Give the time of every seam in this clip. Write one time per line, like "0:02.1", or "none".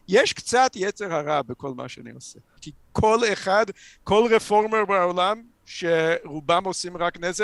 0:02.6